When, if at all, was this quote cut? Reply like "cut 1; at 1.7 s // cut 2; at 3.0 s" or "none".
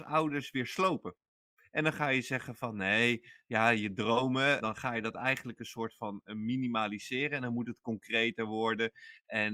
cut 1; at 4.6 s